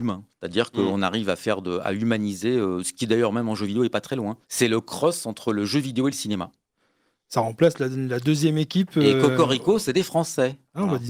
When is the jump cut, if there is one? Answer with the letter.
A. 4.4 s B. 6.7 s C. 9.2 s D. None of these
A